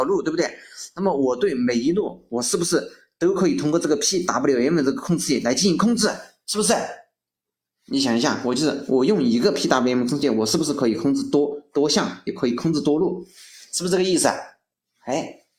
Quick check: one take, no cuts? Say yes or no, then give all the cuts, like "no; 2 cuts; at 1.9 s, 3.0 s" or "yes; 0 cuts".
yes; 0 cuts